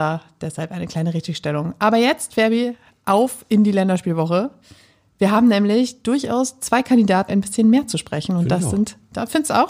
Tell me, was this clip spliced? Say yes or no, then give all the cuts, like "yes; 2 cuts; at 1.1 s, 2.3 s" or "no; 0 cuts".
yes; 1 cut; at 7.3 s